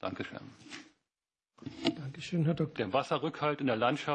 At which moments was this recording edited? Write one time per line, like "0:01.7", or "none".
0:02.8